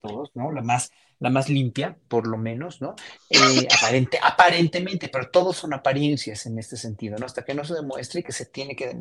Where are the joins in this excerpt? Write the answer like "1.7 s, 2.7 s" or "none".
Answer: none